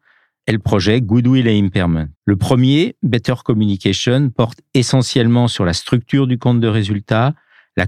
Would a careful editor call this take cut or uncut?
cut